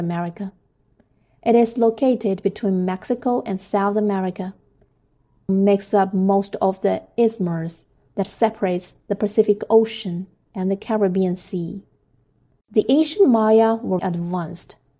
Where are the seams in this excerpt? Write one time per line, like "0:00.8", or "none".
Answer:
0:05.5
0:12.6
0:14.0